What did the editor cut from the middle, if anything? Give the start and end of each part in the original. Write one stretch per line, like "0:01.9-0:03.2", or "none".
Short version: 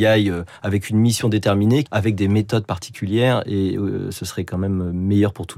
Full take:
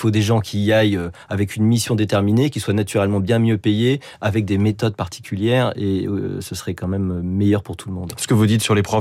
0:02.5-0:04.1

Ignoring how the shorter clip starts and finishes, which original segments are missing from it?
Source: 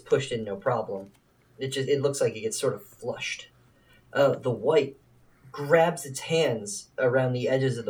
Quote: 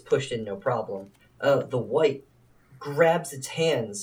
0:01.2-0:03.9

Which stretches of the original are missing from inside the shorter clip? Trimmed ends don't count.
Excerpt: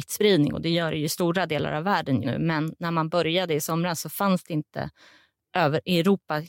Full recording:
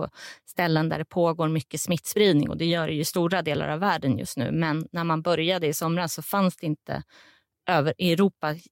0:04.2-0:04.3

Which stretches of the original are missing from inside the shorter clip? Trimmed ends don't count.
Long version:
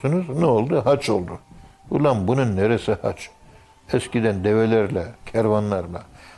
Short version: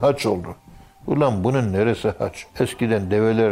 0:03.3-0:03.8

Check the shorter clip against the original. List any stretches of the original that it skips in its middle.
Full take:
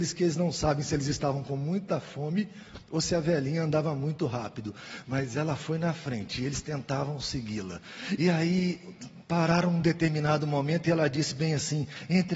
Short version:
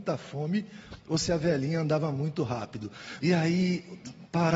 0:05.0-0:08.2

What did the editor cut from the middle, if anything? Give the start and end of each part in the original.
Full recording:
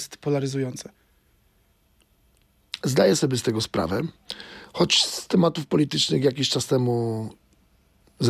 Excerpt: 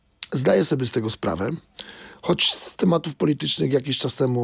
none

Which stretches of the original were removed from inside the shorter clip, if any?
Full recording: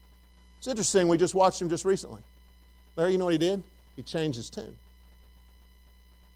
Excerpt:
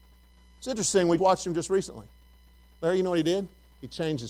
0:01.2-0:01.3

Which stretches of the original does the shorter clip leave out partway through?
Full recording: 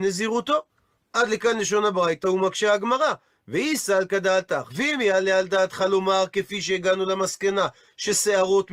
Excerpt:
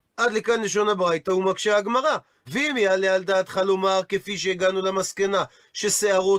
0:03.4-0:04.7

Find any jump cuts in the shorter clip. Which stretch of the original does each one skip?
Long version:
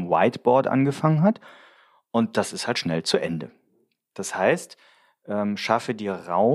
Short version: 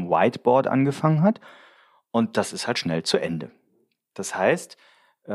none

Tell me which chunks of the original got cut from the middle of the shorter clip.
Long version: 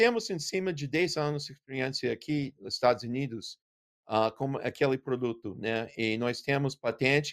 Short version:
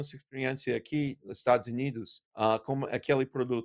0:03.6-0:04.0

